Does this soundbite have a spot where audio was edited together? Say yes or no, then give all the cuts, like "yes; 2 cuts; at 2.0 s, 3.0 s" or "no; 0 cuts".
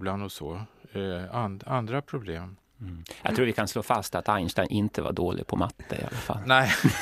no; 0 cuts